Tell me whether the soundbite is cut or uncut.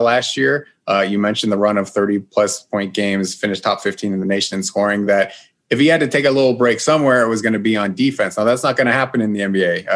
uncut